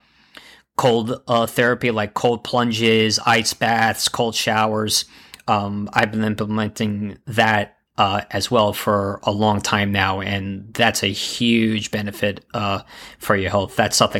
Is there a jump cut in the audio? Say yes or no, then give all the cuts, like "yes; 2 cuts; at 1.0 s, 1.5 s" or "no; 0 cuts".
no; 0 cuts